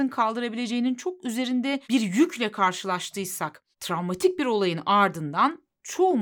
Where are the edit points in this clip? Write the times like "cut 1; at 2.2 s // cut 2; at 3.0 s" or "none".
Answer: cut 1; at 1.8 s // cut 2; at 3.7 s